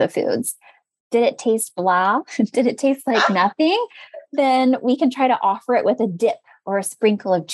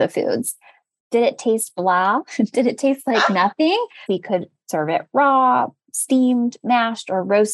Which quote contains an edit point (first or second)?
second